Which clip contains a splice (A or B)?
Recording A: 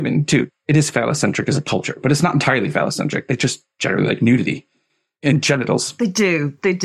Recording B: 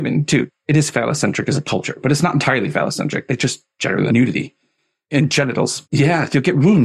B